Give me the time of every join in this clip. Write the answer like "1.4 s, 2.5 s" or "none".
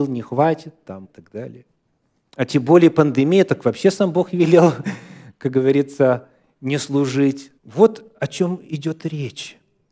1.0 s, 7.6 s